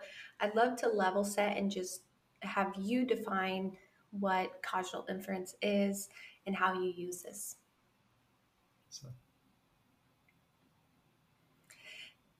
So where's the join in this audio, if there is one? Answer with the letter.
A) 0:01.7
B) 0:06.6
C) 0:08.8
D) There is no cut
C